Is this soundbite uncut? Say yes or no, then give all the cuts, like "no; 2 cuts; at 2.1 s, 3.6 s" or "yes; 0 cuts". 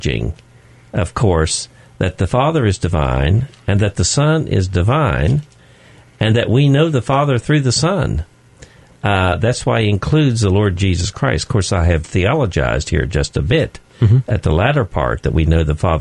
yes; 0 cuts